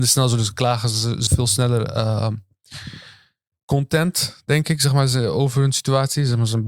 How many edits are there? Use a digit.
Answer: 1